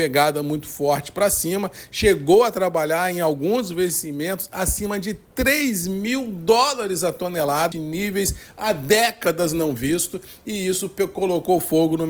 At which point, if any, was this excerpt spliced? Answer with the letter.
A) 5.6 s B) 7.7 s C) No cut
B